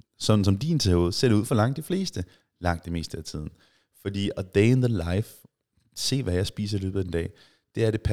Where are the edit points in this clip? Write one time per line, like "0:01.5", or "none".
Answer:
none